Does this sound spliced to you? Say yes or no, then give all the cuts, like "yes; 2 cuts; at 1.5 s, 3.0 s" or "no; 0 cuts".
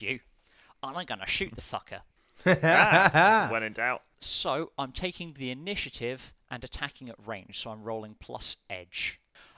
no; 0 cuts